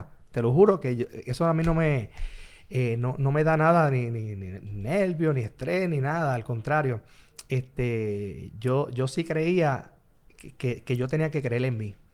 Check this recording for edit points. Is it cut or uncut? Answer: uncut